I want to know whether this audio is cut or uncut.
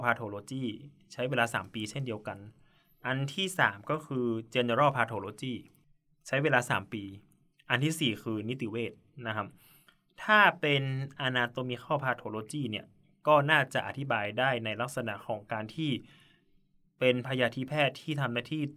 uncut